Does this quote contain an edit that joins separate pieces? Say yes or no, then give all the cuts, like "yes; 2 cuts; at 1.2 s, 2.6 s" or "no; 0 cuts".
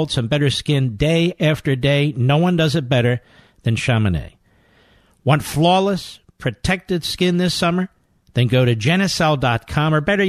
no; 0 cuts